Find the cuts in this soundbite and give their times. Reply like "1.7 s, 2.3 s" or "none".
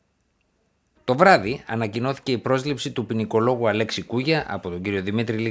0.9 s